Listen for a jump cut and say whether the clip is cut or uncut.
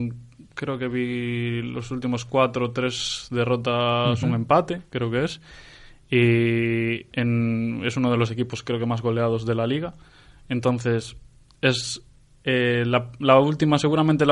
uncut